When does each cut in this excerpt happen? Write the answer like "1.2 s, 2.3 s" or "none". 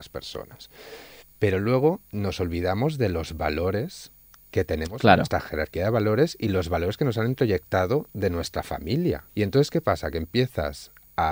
9.3 s